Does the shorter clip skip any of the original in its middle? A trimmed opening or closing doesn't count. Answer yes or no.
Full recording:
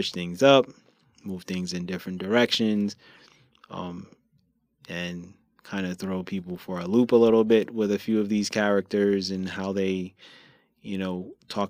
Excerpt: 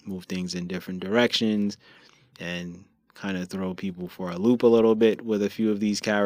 yes